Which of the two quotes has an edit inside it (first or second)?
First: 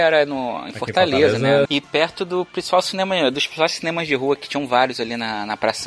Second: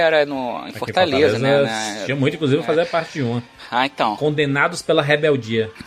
first